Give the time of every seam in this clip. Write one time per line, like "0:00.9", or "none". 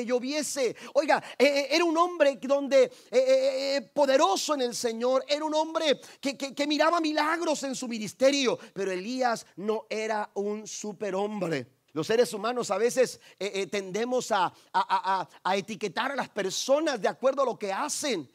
0:11.9